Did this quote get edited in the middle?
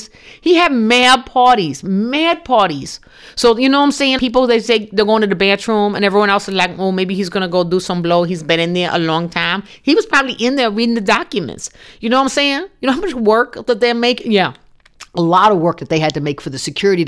yes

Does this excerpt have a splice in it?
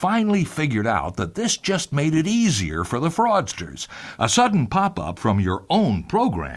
yes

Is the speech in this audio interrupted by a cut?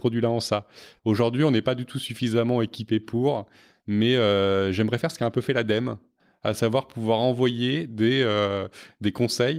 yes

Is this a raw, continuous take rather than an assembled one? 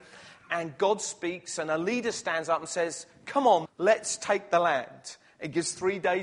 no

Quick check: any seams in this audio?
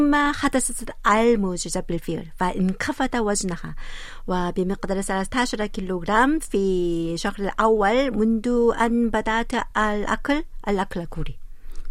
no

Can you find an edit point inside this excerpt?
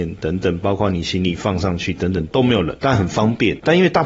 yes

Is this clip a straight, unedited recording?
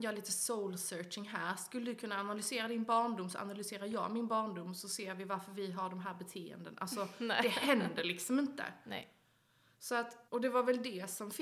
no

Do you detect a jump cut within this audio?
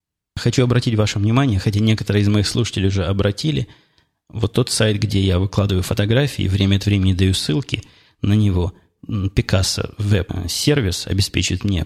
no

